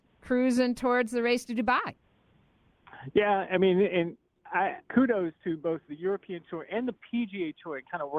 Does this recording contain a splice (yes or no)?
yes